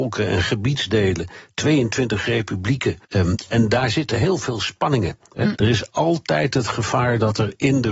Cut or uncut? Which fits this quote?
cut